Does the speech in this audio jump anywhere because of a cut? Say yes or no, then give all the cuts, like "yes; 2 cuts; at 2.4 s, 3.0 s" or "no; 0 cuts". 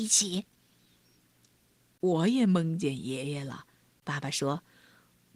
no; 0 cuts